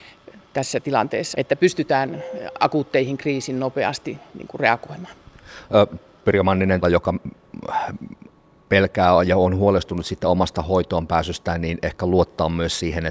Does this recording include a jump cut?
yes; 2 cuts; at 1.3 s, 6.8 s

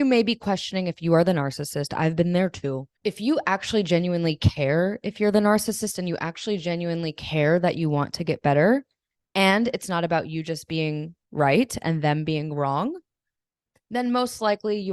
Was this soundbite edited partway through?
yes; 2 cuts; at 3.0 s, 11.2 s

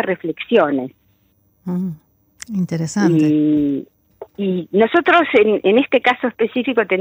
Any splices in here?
no; 0 cuts

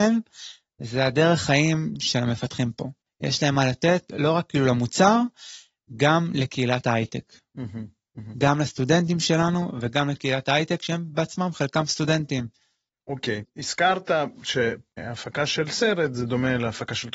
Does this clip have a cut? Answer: yes; 1 cut; at 13.4 s

